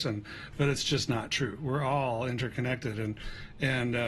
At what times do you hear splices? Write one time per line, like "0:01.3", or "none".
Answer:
none